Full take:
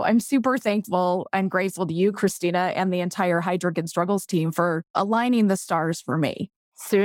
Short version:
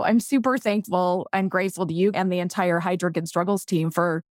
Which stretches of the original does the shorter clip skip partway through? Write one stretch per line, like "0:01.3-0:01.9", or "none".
0:02.1-0:02.7